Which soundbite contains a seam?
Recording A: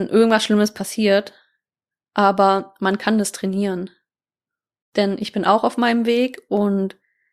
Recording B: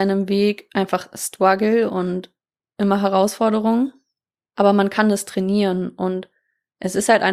A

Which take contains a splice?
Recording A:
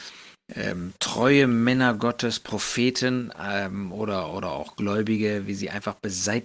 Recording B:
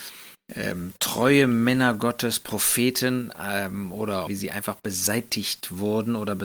B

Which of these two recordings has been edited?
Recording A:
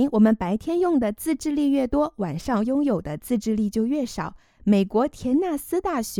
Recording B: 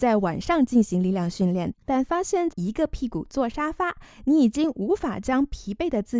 B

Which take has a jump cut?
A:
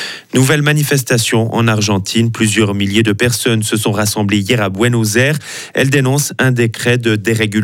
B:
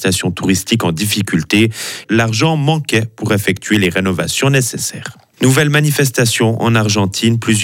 B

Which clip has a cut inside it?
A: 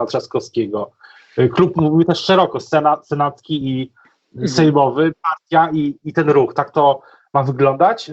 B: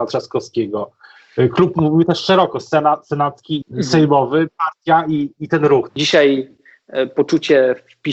B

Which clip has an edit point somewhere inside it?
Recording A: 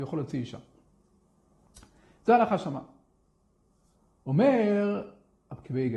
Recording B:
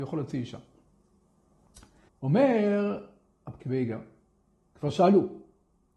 B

